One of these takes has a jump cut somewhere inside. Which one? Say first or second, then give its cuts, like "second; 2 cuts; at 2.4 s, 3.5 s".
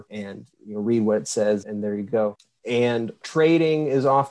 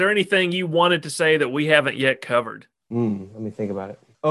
first; 1 cut; at 1.6 s